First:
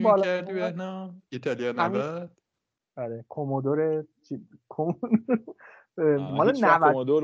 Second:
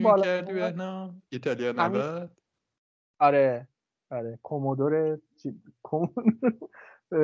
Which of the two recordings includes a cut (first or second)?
first